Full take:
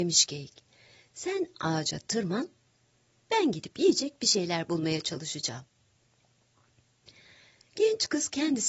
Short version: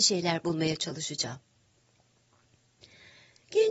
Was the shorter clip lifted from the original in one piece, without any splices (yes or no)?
yes